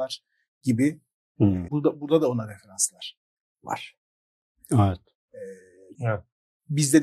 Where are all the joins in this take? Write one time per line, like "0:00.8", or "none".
0:01.7
0:05.9